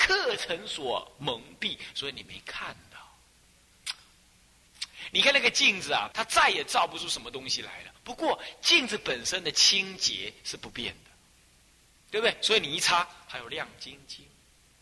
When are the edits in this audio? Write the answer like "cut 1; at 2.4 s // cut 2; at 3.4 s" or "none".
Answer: cut 1; at 6.1 s

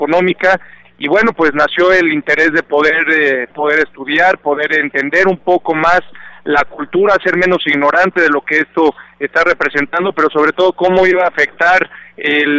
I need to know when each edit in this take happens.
cut 1; at 3.5 s

